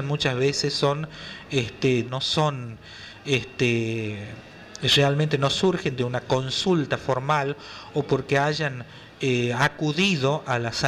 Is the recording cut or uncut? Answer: cut